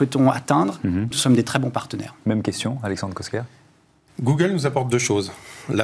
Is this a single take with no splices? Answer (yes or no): no